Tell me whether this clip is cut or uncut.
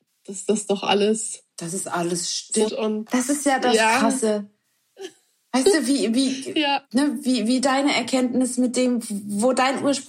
cut